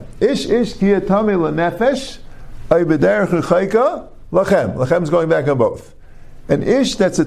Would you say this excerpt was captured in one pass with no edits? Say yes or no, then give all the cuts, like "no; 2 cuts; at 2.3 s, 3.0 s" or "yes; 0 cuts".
yes; 0 cuts